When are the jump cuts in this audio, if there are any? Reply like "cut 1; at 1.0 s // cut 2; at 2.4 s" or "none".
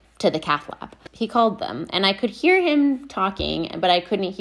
none